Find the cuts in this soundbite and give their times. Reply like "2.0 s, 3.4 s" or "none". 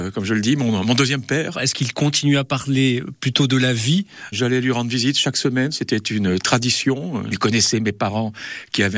1.5 s, 4.3 s, 7.3 s